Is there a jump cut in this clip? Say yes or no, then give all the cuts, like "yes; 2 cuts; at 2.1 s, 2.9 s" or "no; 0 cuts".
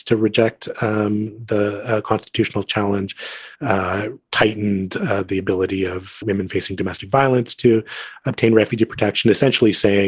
yes; 2 cuts; at 3.5 s, 6.2 s